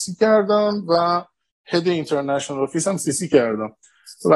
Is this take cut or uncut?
uncut